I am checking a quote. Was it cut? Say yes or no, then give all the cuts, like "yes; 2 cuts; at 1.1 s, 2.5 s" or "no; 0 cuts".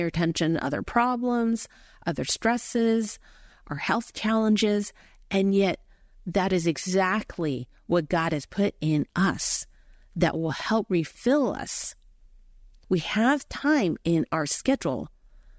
yes; 1 cut; at 12.8 s